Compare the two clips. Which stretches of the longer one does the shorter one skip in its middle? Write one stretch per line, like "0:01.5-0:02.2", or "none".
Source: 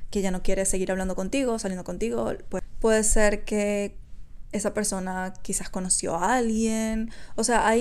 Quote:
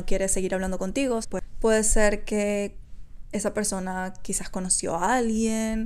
0:01.6-0:02.4